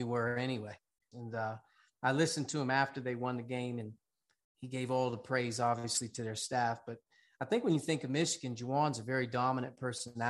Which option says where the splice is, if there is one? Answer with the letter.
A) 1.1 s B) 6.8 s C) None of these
A